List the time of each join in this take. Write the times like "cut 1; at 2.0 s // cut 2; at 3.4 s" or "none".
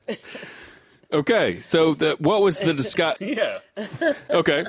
cut 1; at 3.2 s